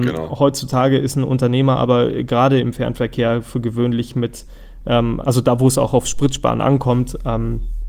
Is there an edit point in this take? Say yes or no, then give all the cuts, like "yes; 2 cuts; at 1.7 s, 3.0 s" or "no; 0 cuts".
yes; 1 cut; at 5.2 s